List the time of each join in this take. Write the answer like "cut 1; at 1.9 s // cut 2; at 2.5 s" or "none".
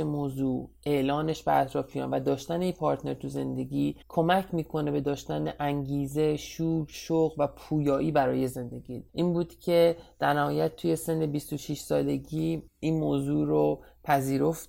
cut 1; at 4.0 s // cut 2; at 9.1 s